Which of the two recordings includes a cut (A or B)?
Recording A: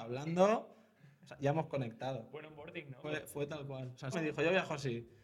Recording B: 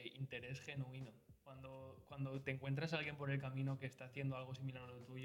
A